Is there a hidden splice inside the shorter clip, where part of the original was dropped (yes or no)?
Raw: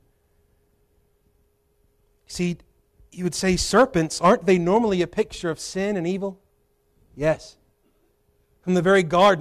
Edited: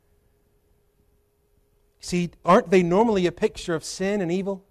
yes